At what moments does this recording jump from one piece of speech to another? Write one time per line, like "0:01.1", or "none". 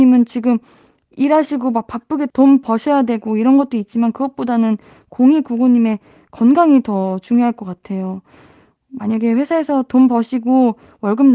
none